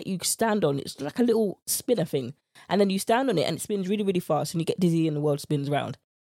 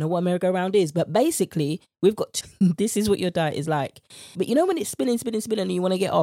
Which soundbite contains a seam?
second; 2 cuts; at 2.4 s, 4.3 s

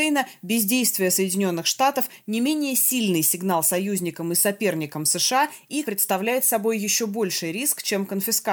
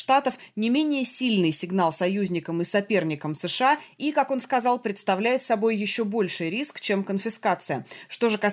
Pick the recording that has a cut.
first; 1 cut; at 5.8 s

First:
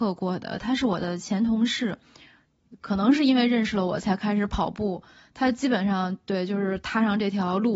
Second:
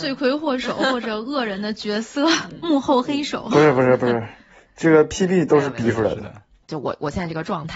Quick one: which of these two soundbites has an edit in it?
second; 1 cut; at 6.6 s

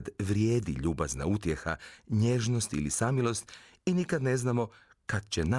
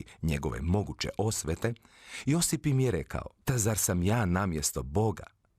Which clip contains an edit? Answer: second; 1 cut; at 3.4 s

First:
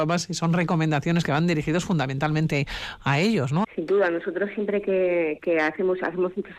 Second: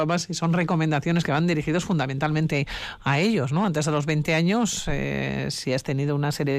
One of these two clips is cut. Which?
first; 1 cut; at 3.6 s

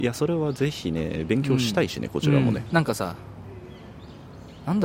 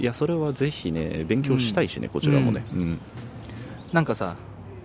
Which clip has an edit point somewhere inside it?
first; 1 cut; at 2.7 s

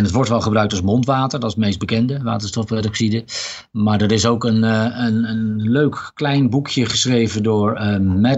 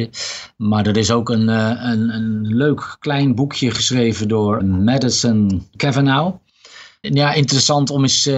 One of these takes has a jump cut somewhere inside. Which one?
second; 2 cuts; at 4.6 s, 7.0 s

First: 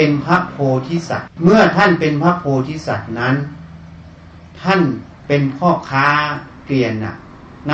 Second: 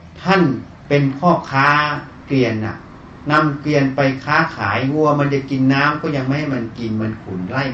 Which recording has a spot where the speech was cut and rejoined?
first; 1 cut; at 1.3 s

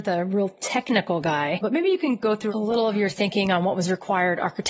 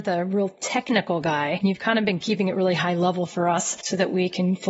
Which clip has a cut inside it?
first; 1 cut; at 1.6 s

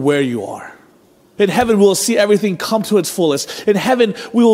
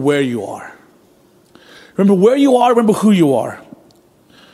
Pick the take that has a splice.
first; 1 cut; at 1.4 s

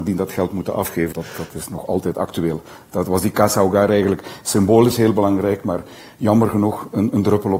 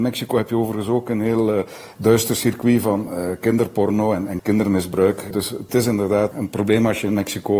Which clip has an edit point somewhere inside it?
first; 1 cut; at 1.1 s

